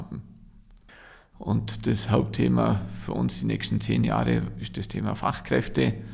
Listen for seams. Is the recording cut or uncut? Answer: cut